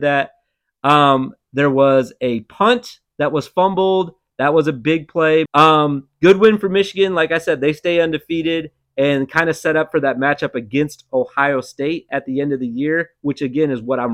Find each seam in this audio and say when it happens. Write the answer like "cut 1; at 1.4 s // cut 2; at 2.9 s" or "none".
cut 1; at 5.5 s

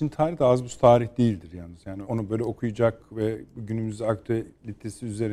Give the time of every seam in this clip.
cut 1; at 2.0 s

